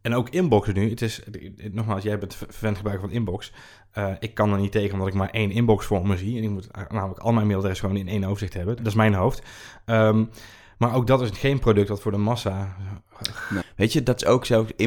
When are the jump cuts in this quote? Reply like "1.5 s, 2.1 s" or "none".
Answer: 8.8 s, 13.6 s

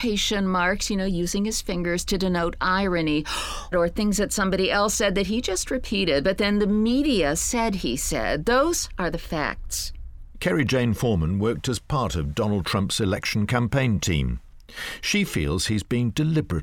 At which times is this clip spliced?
3.7 s

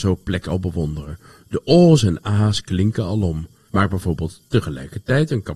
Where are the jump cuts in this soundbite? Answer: 3.7 s

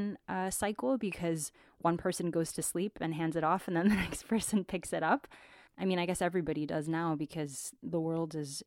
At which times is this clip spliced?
none

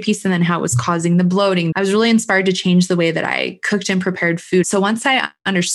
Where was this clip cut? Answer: 1.7 s, 4.6 s

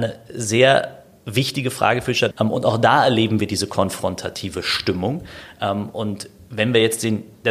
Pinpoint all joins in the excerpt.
2.3 s

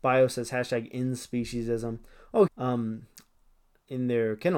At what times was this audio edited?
2.5 s

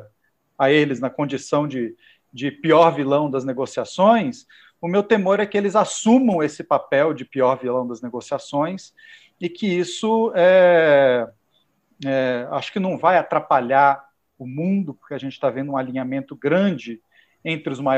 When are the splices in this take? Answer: none

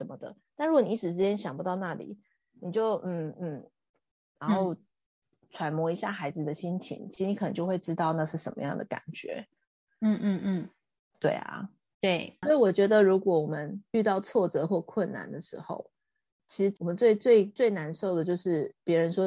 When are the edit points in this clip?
none

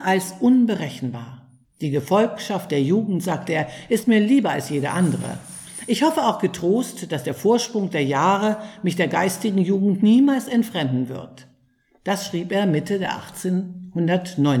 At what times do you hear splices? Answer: 1.6 s

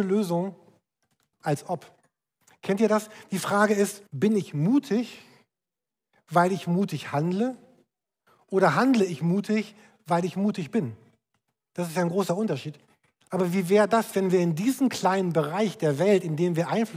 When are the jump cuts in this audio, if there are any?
1.3 s, 4.1 s, 13.3 s

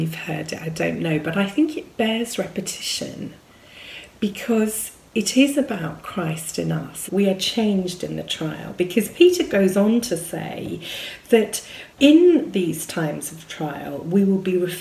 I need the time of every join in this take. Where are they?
7.1 s, 11.9 s

